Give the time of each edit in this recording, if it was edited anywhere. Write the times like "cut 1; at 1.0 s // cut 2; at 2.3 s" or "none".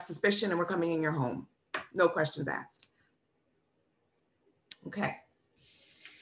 none